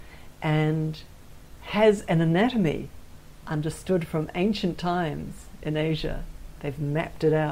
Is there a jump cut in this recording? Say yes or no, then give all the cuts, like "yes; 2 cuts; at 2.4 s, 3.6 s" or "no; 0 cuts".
yes; 1 cut; at 3.4 s